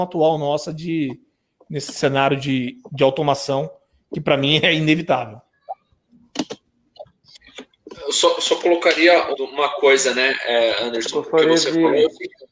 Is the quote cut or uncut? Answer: cut